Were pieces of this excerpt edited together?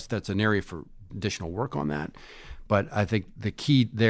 no; 0 cuts

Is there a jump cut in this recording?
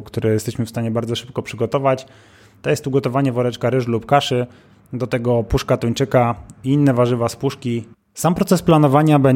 yes; 1 cut; at 7.9 s

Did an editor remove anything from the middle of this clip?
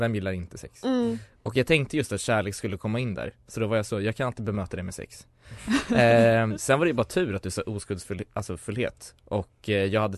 no; 0 cuts

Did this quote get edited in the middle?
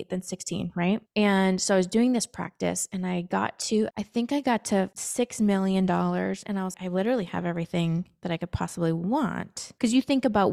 yes; 1 cut; at 6.7 s

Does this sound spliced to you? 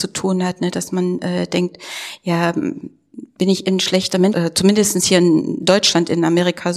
yes; 1 cut; at 4.3 s

